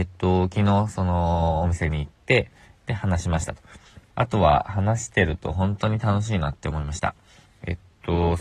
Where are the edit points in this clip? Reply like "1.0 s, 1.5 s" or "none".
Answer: 4.1 s